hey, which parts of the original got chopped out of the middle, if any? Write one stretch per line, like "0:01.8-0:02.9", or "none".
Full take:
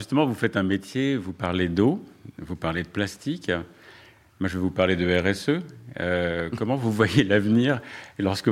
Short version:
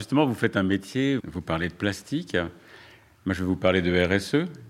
0:01.2-0:02.3